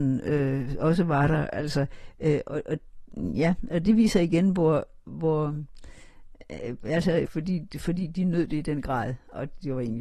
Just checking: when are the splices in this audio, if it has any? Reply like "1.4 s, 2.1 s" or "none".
7.3 s